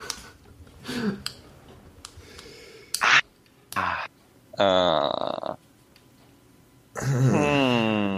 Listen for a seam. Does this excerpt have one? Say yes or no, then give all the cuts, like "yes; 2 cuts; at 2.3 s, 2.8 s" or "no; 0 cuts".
no; 0 cuts